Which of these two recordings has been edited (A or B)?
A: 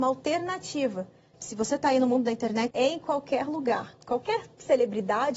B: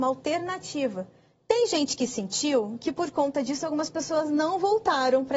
A